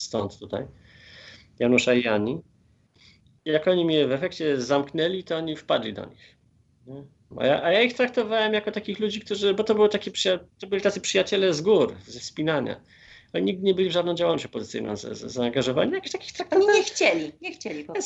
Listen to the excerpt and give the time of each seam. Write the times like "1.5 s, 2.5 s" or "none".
7.3 s